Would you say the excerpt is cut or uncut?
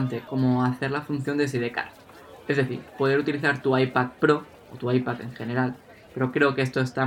uncut